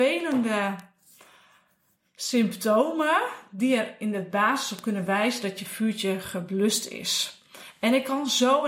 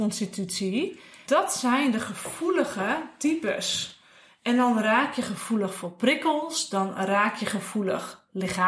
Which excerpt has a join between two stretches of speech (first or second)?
second